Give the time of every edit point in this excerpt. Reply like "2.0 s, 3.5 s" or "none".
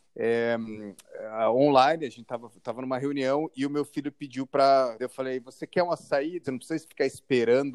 5.0 s, 6.4 s